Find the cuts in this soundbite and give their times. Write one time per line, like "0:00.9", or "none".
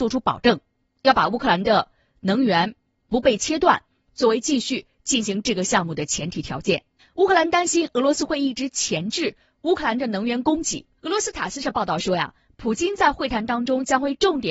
0:07.0
0:11.0